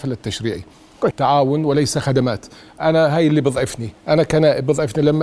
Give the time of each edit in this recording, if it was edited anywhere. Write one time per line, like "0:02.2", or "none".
0:01.1